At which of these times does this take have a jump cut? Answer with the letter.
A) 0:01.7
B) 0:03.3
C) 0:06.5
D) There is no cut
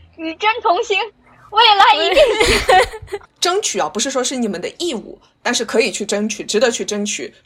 B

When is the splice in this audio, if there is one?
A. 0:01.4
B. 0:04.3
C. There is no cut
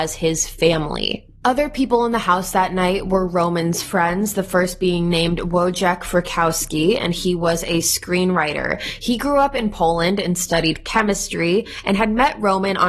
C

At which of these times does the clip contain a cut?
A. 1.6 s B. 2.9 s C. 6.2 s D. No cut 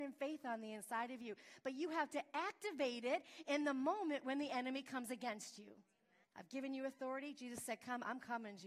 C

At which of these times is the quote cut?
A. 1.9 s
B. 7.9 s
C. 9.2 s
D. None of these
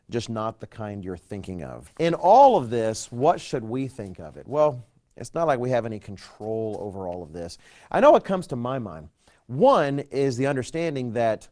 A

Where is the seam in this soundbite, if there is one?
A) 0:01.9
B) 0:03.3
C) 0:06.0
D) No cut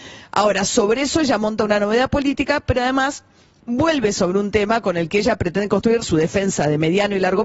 C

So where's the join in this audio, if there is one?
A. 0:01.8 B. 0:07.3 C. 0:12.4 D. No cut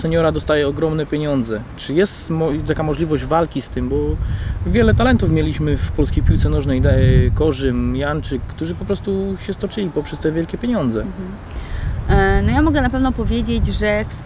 A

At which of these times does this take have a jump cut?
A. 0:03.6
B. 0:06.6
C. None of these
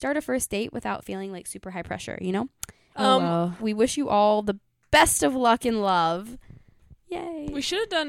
A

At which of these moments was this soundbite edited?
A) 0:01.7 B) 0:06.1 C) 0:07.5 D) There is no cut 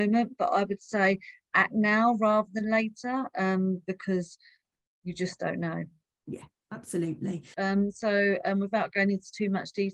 C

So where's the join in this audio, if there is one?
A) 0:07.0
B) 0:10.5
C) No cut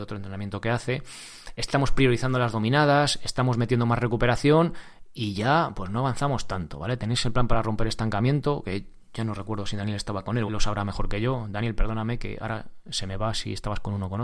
B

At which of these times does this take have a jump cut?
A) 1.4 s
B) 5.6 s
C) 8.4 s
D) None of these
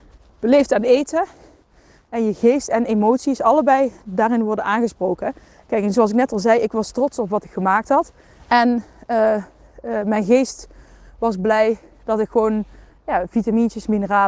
C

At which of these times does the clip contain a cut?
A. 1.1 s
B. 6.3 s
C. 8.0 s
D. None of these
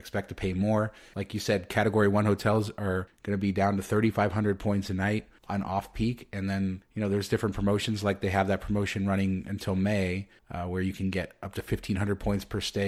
A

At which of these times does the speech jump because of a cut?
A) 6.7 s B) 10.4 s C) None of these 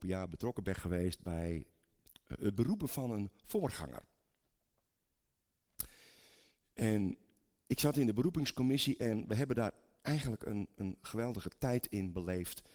C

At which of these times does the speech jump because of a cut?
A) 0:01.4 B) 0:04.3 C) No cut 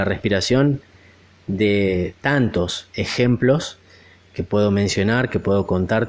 B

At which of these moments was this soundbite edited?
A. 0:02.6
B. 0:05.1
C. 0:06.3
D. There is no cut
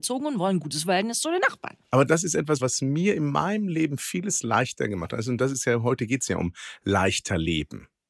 A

